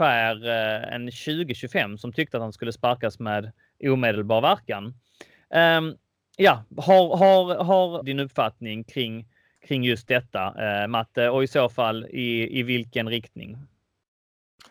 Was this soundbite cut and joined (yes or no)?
yes